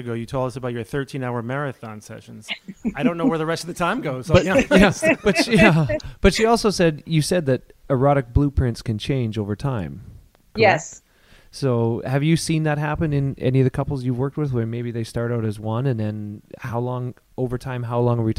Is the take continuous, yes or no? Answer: yes